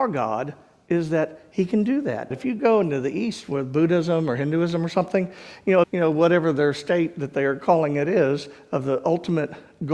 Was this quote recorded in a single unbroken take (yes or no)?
no